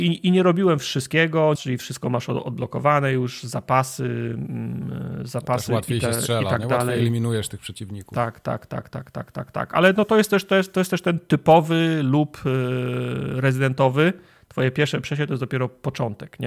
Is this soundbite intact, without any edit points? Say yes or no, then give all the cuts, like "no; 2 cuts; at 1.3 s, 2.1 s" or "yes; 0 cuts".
no; 1 cut; at 1.5 s